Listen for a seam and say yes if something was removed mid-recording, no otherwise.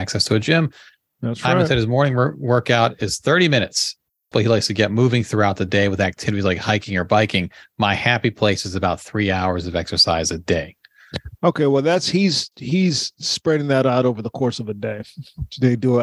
yes